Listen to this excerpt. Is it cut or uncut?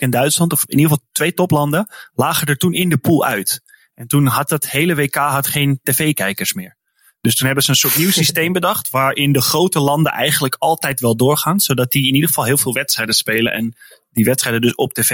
uncut